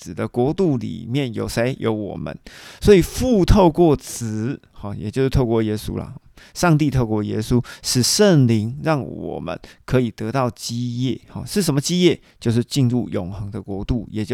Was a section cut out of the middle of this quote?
no; 0 cuts

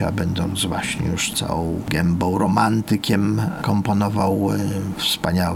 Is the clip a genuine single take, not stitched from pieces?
yes; 0 cuts

